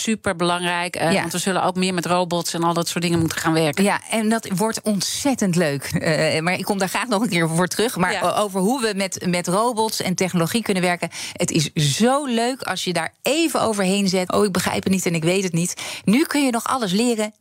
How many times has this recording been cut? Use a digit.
2